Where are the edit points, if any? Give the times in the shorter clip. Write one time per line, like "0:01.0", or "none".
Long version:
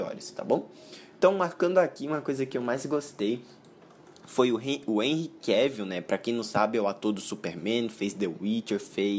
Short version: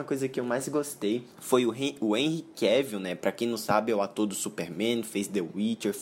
0:01.3